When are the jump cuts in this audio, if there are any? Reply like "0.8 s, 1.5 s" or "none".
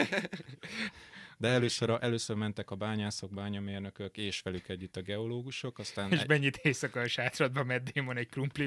none